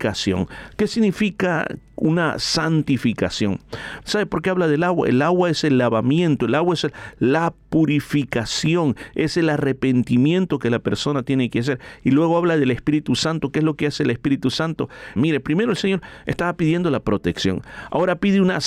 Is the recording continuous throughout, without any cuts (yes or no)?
no